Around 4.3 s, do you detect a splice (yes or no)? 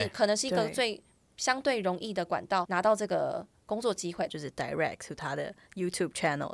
yes